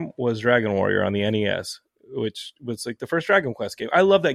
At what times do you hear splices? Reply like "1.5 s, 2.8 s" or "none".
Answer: none